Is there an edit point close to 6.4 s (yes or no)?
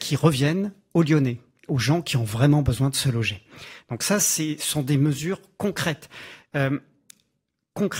yes